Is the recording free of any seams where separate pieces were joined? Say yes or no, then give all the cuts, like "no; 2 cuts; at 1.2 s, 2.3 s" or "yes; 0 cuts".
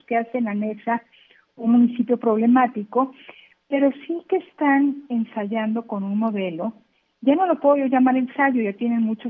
yes; 0 cuts